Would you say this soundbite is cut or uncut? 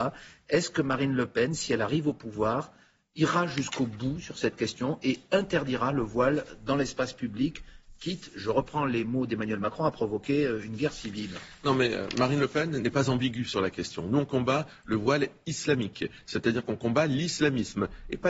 uncut